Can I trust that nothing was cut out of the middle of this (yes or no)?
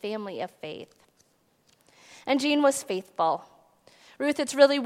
yes